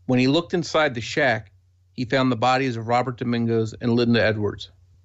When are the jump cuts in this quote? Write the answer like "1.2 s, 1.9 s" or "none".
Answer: none